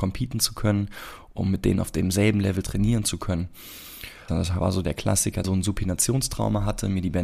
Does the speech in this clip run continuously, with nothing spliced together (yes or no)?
no